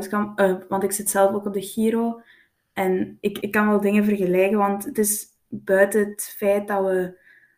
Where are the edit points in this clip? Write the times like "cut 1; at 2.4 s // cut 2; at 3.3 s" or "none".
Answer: cut 1; at 3.4 s